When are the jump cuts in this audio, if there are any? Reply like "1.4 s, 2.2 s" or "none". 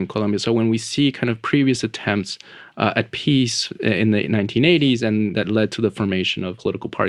none